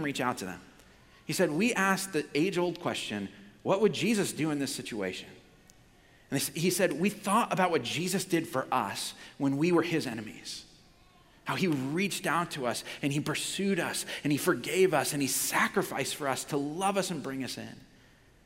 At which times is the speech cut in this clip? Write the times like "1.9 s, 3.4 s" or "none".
none